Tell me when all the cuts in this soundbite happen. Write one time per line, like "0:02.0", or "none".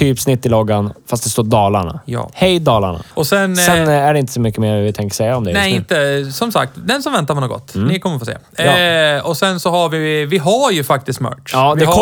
0:03.1

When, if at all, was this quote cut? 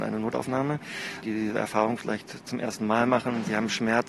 0:01.2

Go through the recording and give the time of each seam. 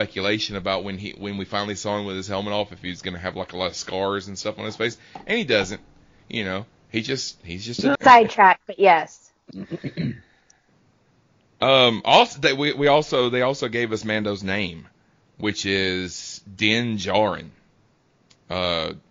0:08.0

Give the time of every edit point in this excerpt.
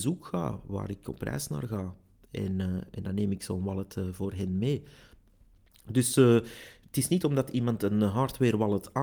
none

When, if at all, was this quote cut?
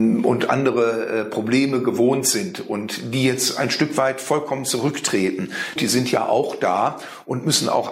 0:05.8

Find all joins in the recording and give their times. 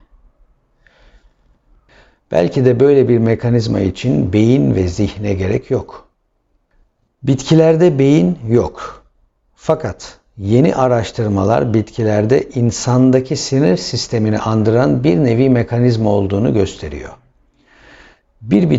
none

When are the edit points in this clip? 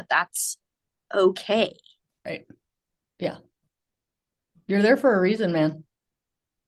none

